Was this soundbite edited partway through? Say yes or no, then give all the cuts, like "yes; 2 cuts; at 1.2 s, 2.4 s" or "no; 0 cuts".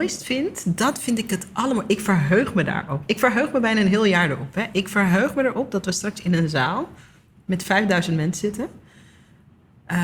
no; 0 cuts